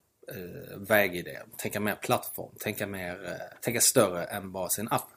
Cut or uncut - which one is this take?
cut